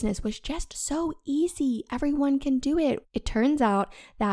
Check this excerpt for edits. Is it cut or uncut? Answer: cut